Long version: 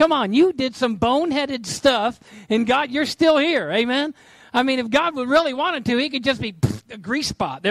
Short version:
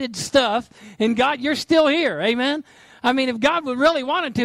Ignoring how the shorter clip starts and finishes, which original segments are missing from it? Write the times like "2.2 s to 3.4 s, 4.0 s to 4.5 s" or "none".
none